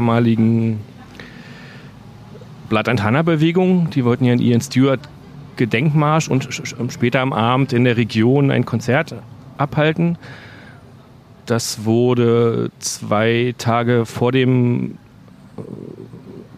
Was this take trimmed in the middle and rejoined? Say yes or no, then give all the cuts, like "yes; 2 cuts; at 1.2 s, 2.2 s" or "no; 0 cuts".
no; 0 cuts